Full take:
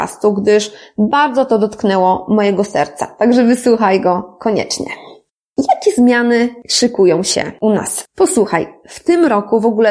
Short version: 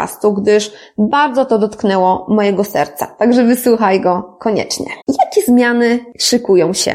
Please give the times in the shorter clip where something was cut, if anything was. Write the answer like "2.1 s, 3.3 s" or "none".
5.0 s